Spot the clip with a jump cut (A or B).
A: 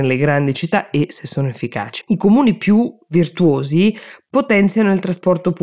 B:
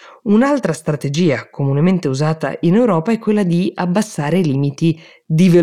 A